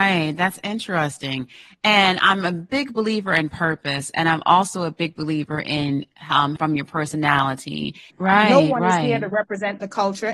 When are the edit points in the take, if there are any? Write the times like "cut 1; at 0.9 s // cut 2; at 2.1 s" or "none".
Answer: cut 1; at 6.6 s // cut 2; at 8.1 s